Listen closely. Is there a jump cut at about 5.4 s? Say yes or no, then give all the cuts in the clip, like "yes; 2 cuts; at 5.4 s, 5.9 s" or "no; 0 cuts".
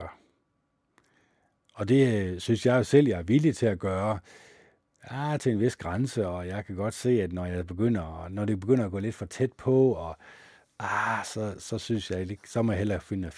no; 0 cuts